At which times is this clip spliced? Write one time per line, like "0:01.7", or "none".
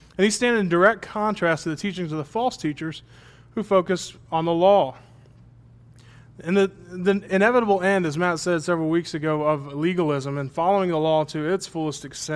none